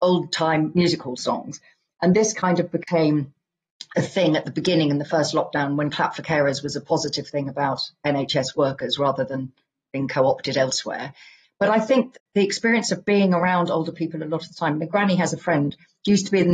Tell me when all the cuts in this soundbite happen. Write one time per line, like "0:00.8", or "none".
0:11.4